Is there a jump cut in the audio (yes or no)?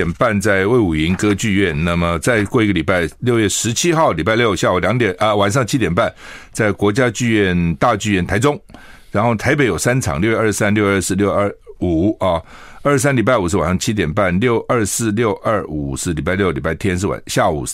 no